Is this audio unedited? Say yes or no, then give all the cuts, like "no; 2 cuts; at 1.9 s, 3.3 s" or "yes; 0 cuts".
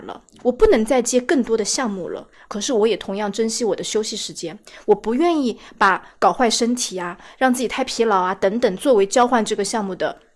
no; 1 cut; at 2.5 s